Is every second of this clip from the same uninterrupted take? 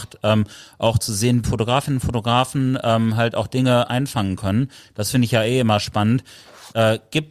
no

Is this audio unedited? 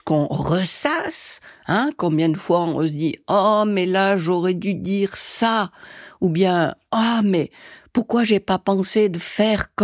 yes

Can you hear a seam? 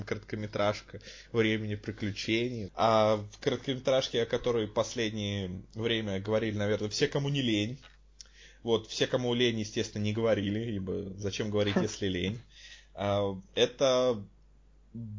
yes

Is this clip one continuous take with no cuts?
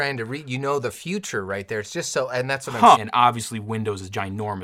no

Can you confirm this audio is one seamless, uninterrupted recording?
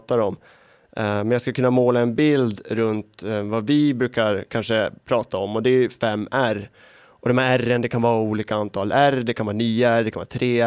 yes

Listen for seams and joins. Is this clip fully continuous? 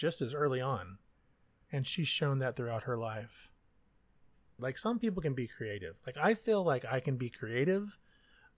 no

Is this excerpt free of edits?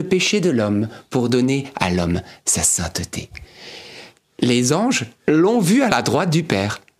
no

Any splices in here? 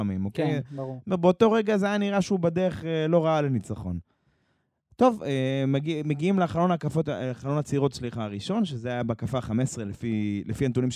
no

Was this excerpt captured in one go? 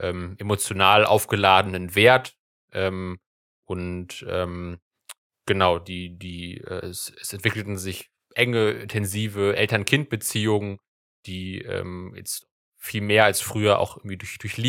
yes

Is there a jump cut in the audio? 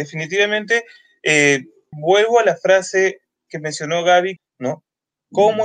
yes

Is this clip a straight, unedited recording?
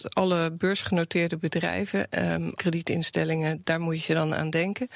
no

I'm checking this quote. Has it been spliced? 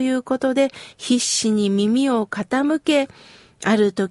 no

